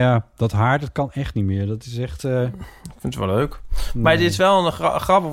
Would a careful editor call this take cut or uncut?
uncut